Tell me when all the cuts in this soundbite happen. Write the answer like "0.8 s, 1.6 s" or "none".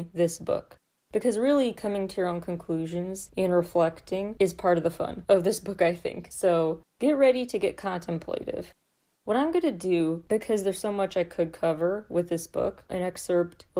1.1 s, 9.2 s, 12.9 s